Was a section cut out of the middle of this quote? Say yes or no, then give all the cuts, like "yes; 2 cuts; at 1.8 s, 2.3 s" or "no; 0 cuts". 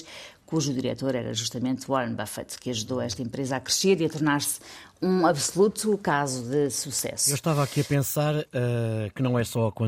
no; 0 cuts